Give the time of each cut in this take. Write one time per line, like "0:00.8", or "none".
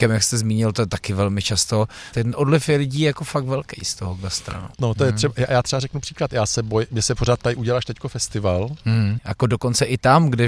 0:02.1
0:04.8
0:09.2